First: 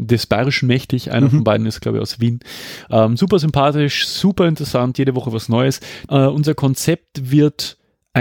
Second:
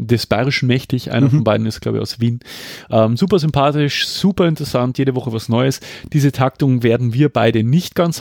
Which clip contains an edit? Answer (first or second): first